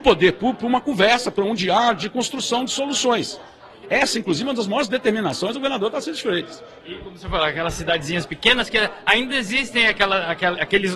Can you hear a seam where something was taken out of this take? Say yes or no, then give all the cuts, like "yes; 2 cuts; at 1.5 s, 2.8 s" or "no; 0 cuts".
yes; 1 cut; at 3.8 s